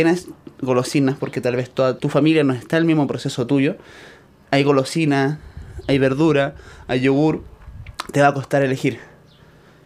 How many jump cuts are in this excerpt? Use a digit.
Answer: 1